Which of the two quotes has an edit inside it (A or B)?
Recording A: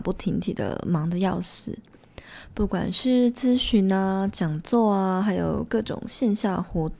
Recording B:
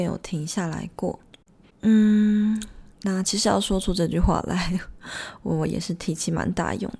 B